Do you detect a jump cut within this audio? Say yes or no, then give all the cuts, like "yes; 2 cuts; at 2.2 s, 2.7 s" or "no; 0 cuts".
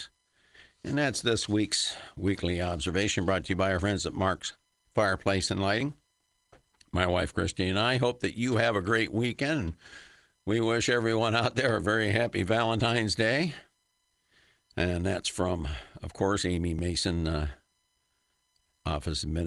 no; 0 cuts